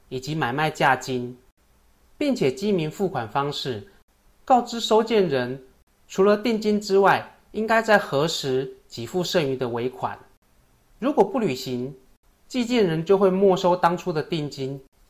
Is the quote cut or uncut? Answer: uncut